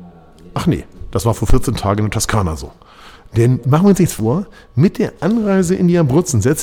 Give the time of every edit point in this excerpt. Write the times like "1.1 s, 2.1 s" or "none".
none